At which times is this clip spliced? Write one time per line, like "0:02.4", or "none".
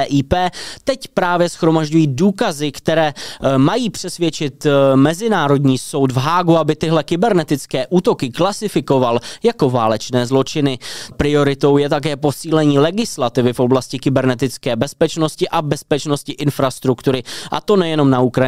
0:11.1